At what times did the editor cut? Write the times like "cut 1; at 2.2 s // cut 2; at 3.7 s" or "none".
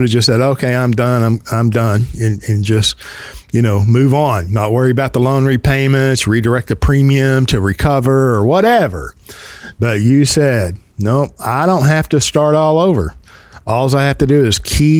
none